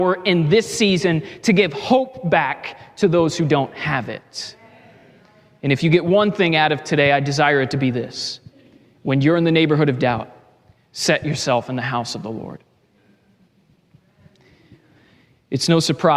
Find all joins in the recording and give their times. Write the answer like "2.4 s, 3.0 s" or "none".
none

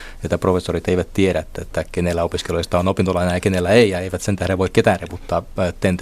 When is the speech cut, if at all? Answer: none

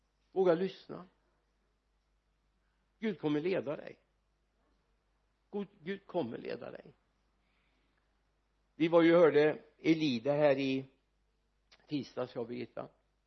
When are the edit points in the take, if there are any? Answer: none

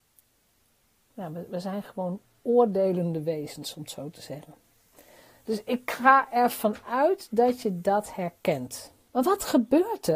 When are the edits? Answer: 1.1 s

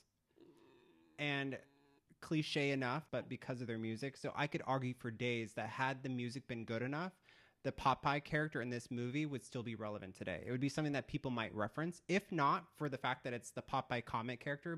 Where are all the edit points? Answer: 3.1 s

